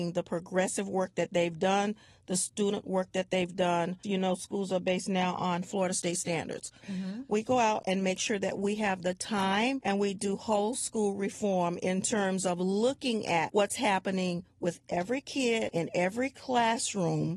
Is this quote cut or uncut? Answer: cut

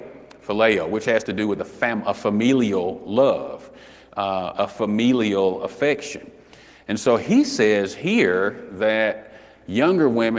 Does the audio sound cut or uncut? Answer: uncut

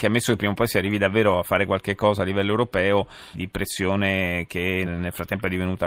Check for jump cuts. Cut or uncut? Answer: cut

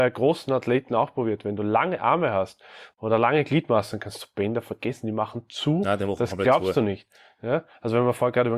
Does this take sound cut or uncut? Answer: uncut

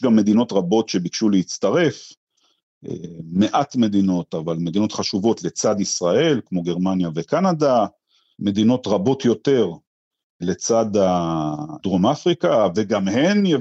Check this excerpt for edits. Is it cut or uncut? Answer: uncut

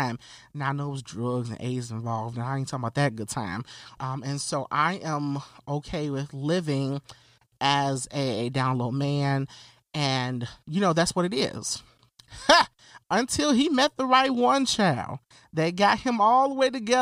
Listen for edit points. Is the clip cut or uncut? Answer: cut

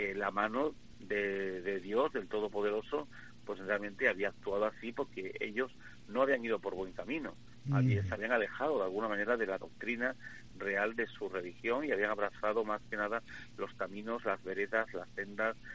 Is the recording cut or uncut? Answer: uncut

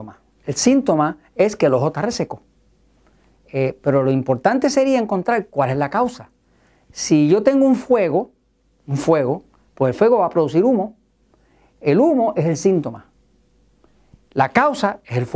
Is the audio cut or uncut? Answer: uncut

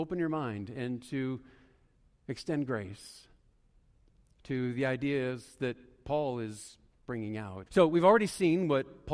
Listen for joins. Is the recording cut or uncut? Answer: cut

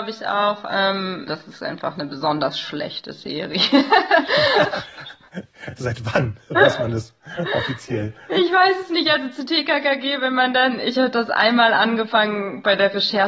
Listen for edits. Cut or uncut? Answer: cut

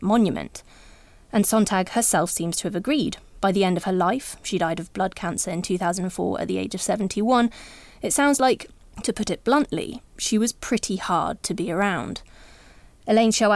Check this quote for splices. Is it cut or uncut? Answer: uncut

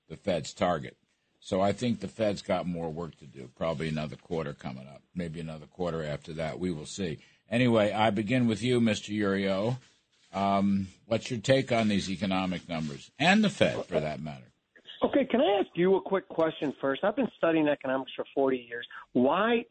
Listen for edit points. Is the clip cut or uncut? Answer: uncut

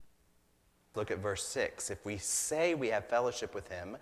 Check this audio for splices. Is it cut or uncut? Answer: cut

